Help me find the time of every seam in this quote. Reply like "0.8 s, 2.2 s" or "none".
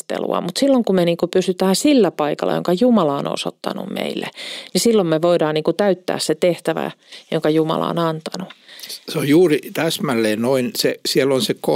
none

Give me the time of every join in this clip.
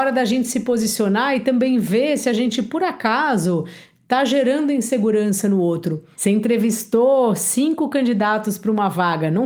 6.1 s

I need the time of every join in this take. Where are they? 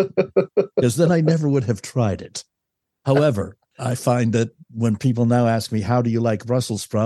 none

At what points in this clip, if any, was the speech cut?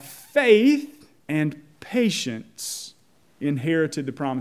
1.2 s

